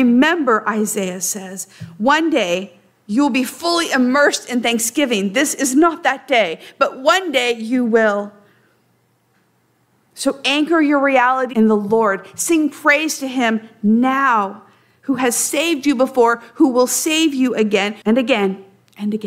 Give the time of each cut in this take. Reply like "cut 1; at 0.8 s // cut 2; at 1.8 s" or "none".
cut 1; at 11.5 s // cut 2; at 18.0 s